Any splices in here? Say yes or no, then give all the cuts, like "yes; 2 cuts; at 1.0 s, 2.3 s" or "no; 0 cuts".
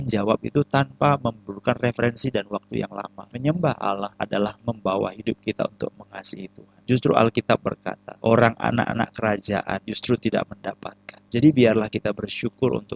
yes; 2 cuts; at 3.3 s, 8.2 s